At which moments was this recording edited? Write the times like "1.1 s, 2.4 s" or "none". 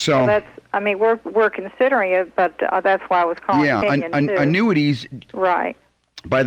3.8 s, 5.3 s